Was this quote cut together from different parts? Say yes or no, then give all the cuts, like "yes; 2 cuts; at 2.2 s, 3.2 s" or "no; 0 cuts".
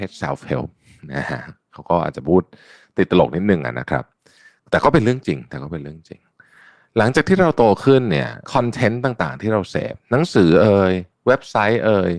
yes; 1 cut; at 8.4 s